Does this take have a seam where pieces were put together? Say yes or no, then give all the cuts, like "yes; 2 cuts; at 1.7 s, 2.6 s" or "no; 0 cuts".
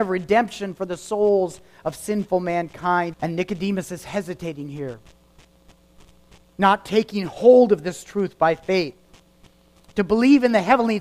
yes; 1 cut; at 3.1 s